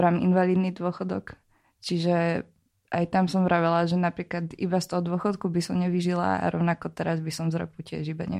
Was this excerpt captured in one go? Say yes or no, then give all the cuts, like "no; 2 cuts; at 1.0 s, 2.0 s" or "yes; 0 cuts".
yes; 0 cuts